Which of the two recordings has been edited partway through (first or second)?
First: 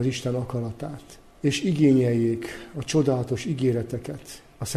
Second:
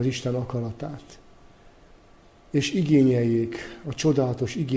first